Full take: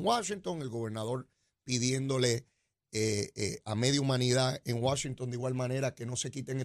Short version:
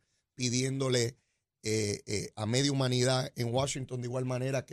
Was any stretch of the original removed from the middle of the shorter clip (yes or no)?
no